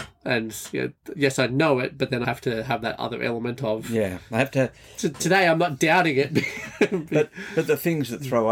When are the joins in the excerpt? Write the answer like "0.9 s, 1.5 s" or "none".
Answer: 2.2 s